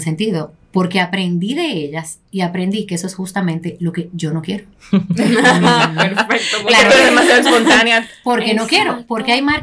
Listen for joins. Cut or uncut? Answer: uncut